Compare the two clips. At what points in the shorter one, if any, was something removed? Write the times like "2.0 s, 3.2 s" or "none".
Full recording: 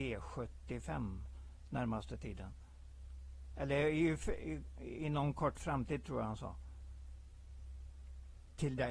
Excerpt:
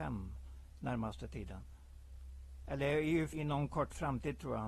3.3 s